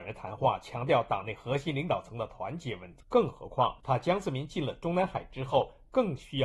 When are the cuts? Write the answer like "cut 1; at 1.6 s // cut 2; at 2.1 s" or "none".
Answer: cut 1; at 3.0 s